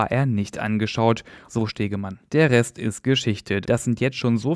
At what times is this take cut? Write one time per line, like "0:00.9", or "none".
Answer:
0:01.5
0:03.6